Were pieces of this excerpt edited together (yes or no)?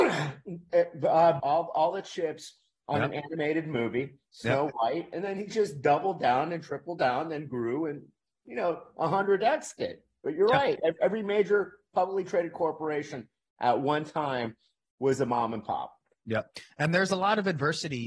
yes